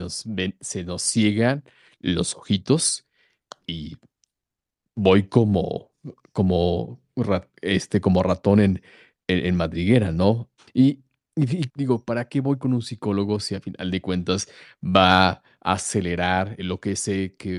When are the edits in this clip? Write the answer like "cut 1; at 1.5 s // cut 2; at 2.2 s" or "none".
cut 1; at 10.6 s // cut 2; at 11.7 s // cut 3; at 16.6 s